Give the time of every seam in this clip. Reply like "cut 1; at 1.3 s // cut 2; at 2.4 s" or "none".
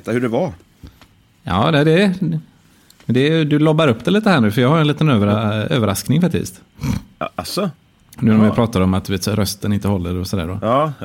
none